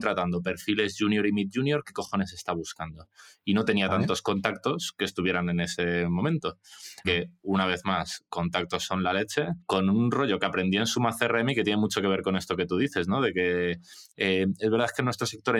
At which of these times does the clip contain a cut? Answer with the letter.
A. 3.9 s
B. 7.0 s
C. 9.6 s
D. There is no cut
B